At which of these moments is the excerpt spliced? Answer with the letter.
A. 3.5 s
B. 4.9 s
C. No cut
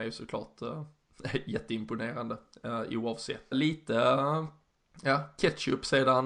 A